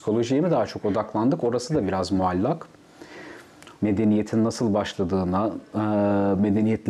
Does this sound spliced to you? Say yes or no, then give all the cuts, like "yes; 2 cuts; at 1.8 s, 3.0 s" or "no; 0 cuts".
yes; 1 cut; at 3.7 s